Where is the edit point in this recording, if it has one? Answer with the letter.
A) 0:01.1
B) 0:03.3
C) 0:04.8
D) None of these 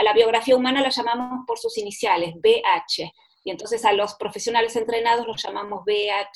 D